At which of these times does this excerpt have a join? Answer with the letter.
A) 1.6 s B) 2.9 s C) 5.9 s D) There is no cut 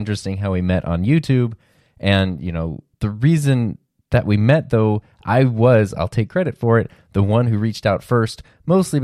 B